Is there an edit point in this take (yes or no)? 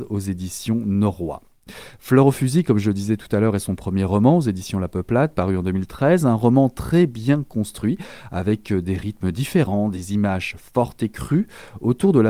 no